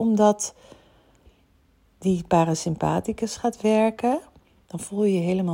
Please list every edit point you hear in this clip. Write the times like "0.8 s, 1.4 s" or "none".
4.6 s